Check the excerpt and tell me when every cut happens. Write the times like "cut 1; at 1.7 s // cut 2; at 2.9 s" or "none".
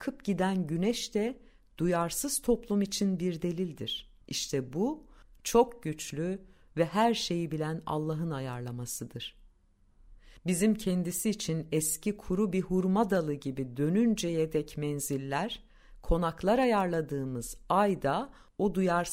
cut 1; at 4.2 s